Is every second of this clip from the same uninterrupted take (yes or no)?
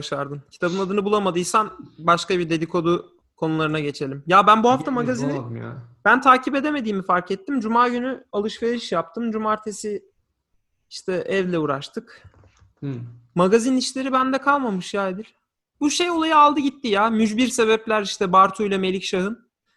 no